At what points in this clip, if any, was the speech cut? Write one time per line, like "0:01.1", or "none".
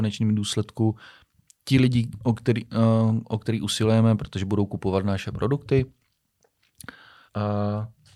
0:07.3